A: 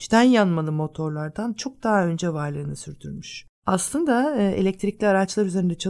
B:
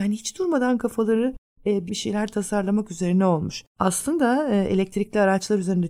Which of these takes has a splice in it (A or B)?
B